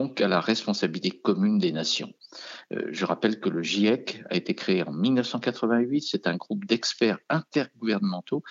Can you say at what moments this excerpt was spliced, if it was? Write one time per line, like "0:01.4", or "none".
none